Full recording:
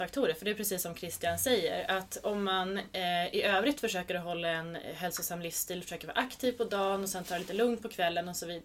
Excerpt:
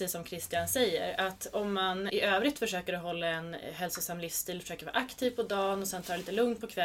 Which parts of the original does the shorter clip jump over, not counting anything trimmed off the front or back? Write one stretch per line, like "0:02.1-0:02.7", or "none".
0:02.8-0:03.3